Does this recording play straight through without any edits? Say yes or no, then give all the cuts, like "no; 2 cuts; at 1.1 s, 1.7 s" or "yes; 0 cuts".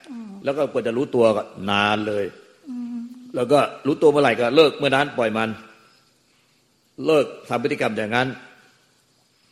yes; 0 cuts